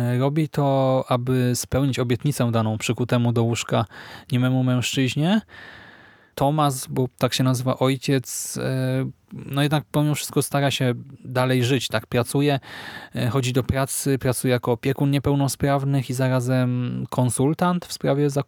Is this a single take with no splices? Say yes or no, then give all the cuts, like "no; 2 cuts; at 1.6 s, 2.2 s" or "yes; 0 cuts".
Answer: no; 1 cut; at 6.3 s